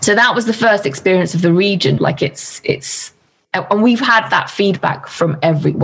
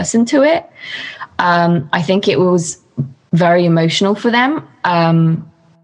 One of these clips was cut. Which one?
first; 1 cut; at 2.0 s

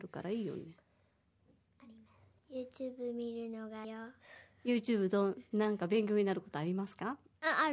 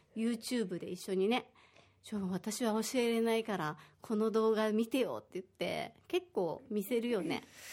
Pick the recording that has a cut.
first; 2 cuts; at 2.4 s, 3.8 s

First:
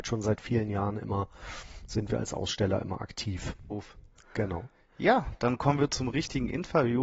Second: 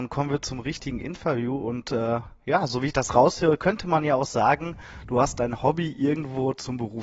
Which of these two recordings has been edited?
first; 1 cut; at 3.7 s

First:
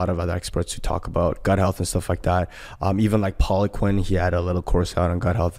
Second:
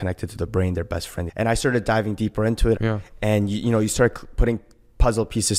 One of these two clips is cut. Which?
second; 2 cuts; at 1.3 s, 2.8 s

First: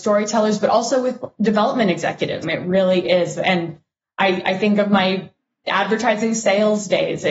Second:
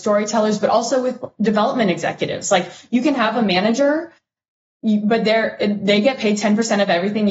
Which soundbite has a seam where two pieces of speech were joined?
first; 1 cut; at 2.4 s

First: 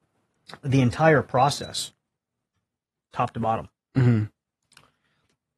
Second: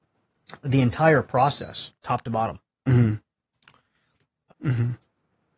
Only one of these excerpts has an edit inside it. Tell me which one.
second; 2 cuts; at 2.0 s, 4.5 s

